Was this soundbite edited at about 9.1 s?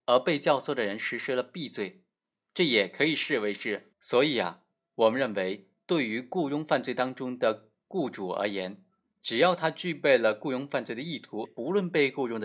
no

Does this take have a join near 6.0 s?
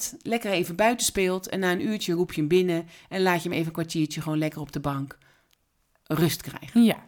no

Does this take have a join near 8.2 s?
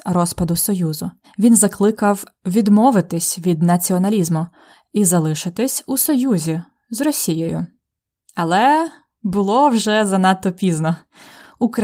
no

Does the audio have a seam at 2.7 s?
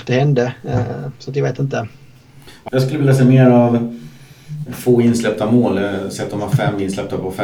yes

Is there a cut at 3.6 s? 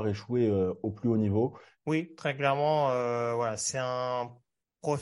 no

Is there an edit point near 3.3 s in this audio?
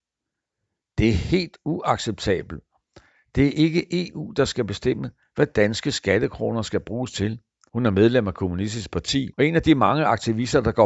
no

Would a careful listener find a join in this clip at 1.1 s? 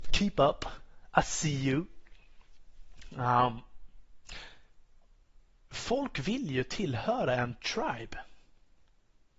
no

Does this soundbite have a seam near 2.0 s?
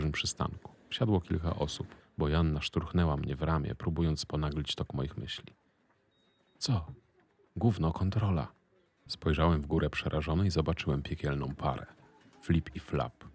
yes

